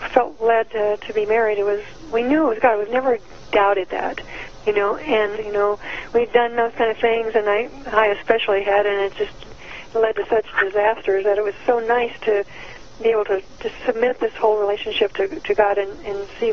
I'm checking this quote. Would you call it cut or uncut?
cut